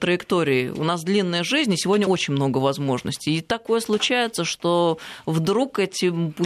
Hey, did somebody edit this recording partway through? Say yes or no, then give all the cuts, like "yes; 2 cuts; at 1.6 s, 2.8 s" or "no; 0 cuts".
no; 0 cuts